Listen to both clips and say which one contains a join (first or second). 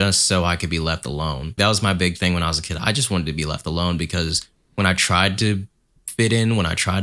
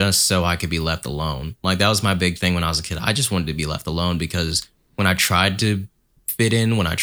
first